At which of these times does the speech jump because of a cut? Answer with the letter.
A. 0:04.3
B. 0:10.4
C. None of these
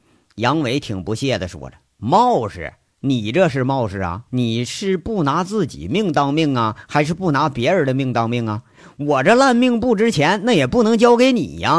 A